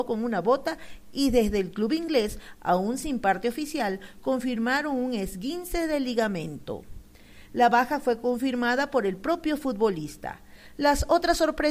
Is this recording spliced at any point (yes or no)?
no